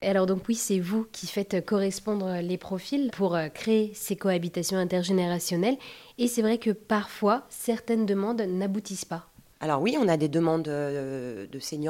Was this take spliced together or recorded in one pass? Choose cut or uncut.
uncut